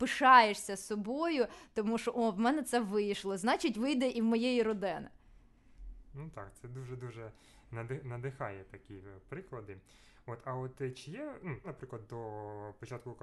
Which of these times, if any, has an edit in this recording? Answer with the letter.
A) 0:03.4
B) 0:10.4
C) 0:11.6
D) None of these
C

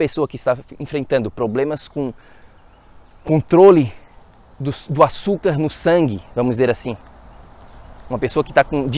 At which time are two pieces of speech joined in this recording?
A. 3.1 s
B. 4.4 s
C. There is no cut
C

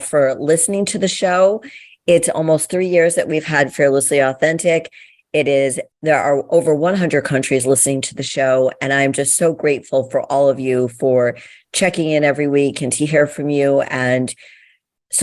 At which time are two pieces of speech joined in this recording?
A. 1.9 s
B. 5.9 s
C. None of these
B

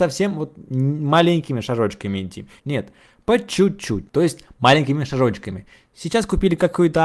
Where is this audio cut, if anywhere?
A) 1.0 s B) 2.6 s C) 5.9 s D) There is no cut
B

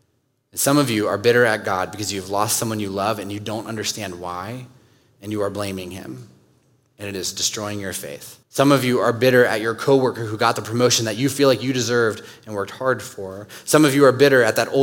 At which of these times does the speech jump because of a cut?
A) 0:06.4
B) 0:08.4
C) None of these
B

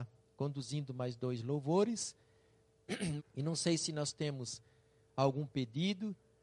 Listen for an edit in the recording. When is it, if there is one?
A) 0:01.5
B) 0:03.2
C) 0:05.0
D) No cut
B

